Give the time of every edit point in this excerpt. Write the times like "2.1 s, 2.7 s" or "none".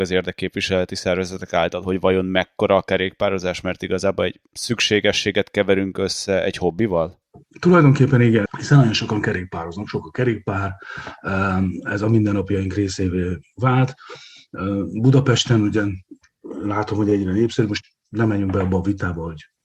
8.5 s